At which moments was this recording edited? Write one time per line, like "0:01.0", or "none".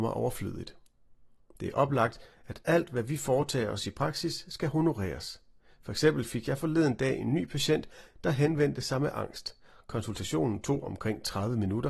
0:05.7

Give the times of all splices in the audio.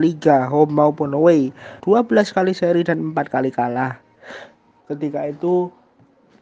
0:01.8
0:04.8

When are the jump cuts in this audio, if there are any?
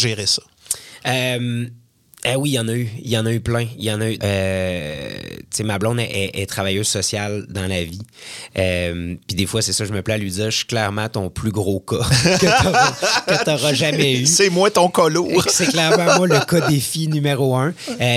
0:04.2

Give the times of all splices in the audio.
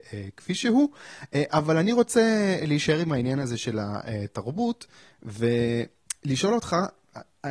none

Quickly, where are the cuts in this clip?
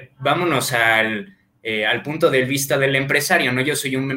none

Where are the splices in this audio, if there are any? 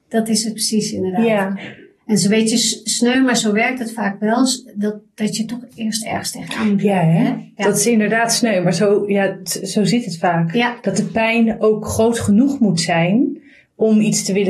none

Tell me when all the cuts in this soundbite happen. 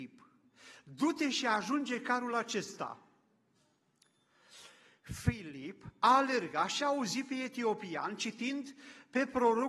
none

